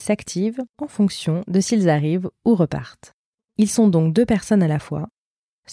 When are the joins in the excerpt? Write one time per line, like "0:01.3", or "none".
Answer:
none